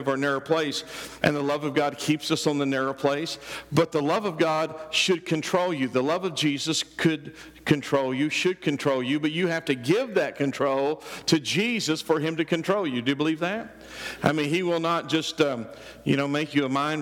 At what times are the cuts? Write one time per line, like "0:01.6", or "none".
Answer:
0:01.2